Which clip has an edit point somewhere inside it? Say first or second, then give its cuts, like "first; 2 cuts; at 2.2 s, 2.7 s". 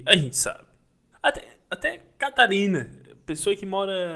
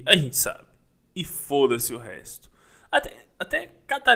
first; 1 cut; at 1.1 s